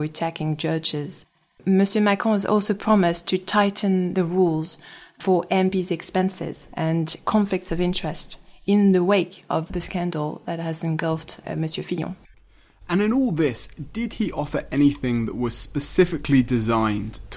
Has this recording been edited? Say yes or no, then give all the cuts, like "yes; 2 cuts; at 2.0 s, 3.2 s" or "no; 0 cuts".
no; 0 cuts